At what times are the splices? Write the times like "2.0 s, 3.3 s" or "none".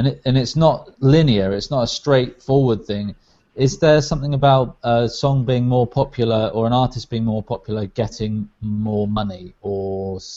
none